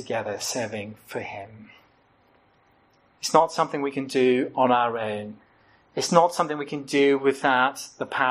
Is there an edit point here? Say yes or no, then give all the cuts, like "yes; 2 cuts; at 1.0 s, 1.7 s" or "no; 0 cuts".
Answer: no; 0 cuts